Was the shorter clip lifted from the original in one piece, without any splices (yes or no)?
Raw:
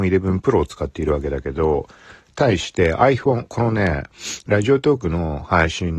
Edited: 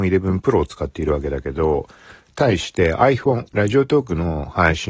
no